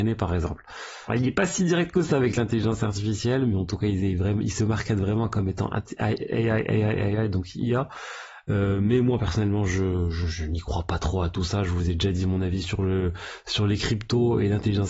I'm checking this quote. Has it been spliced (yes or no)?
yes